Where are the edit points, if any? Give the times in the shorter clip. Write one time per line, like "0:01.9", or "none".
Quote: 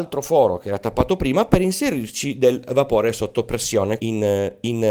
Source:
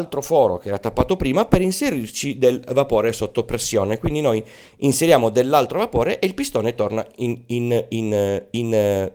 0:04.0